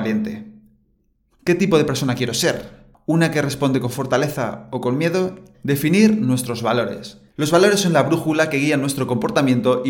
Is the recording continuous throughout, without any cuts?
no; 3 cuts; at 1.3 s, 5.5 s, 7.3 s

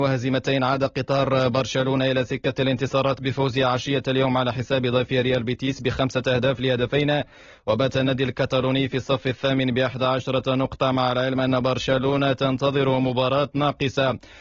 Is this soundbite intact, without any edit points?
yes; 0 cuts

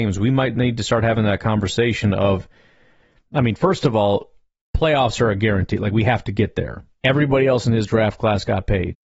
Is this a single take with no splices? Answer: no; 1 cut; at 7.0 s

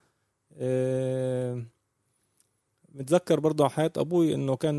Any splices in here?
no; 0 cuts

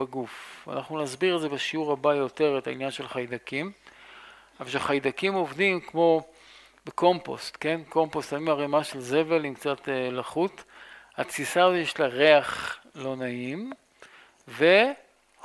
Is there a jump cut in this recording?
yes; 1 cut; at 11.1 s

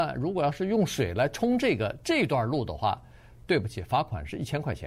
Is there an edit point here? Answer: no; 0 cuts

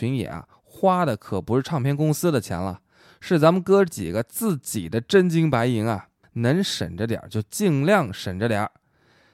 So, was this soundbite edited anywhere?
no; 0 cuts

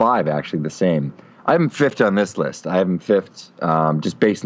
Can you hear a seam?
no; 0 cuts

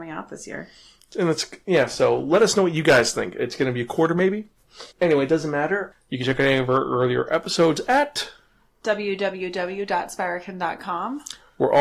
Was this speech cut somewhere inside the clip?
yes; 2 cuts; at 4.9 s, 5.9 s

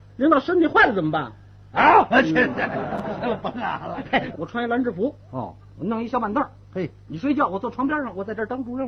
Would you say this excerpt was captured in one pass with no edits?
no; 1 cut; at 4.3 s

